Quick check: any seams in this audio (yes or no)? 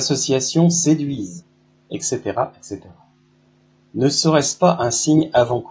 no